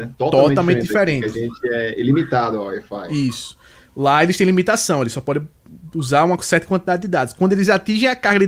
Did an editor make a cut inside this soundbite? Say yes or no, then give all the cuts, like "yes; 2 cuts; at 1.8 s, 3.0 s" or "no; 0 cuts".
no; 0 cuts